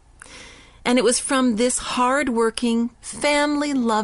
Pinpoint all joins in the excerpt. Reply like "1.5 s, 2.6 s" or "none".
2.9 s